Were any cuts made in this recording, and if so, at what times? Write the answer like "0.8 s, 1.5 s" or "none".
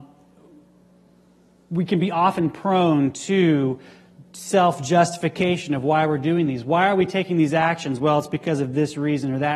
none